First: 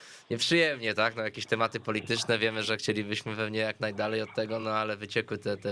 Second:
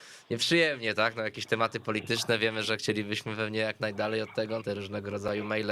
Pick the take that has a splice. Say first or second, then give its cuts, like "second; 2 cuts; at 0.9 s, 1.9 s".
second; 1 cut; at 4.6 s